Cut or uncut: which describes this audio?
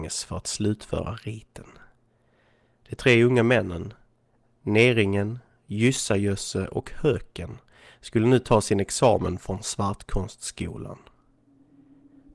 uncut